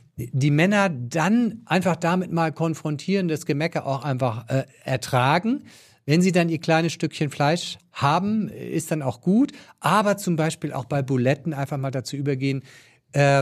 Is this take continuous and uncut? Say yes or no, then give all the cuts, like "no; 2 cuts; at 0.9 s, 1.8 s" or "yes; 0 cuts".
yes; 0 cuts